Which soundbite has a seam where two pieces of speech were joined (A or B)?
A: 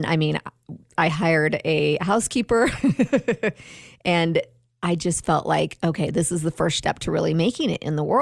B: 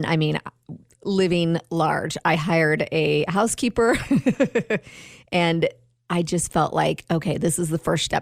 A